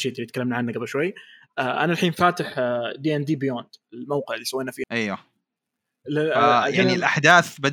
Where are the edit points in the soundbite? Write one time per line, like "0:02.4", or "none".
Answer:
0:04.8